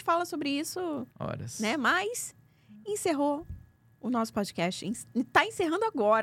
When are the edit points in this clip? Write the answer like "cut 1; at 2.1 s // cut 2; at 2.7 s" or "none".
cut 1; at 1.1 s